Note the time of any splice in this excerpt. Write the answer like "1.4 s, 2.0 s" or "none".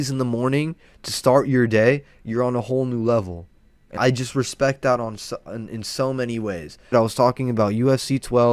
4.0 s, 6.9 s